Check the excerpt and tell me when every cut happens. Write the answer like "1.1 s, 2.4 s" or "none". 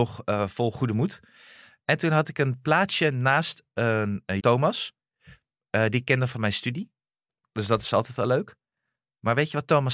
4.4 s